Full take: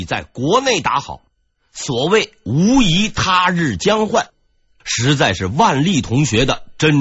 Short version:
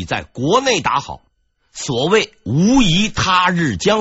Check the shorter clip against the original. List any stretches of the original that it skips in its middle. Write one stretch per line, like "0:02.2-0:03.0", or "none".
none